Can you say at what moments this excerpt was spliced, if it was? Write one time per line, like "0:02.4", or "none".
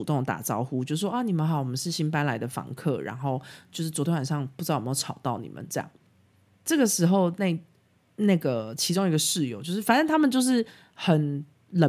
none